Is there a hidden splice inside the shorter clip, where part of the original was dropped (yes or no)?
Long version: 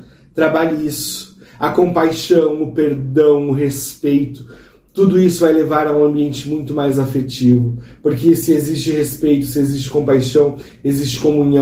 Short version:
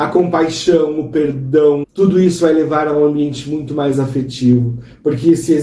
yes